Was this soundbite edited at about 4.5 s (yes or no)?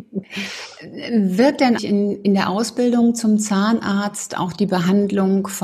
no